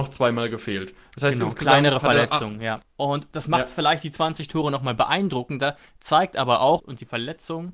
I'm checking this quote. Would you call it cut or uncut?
cut